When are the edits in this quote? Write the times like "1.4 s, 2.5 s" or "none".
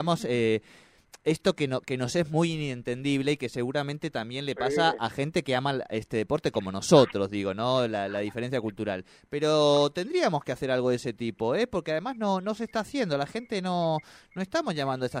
none